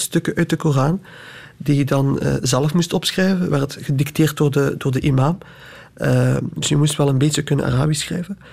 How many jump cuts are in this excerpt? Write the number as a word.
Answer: zero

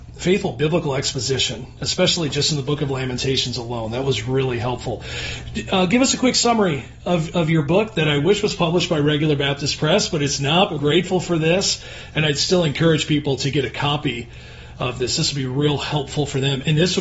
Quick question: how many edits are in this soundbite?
one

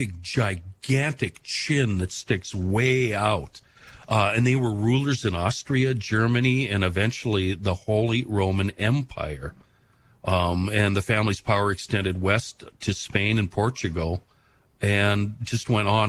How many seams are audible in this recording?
zero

